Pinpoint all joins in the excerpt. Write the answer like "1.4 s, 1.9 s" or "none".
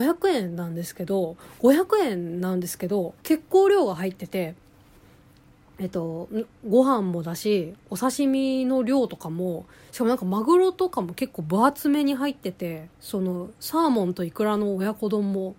3.2 s, 12.9 s